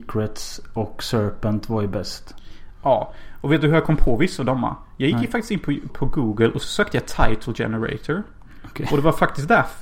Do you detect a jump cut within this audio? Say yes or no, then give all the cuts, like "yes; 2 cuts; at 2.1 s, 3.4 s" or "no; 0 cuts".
yes; 1 cut; at 5.9 s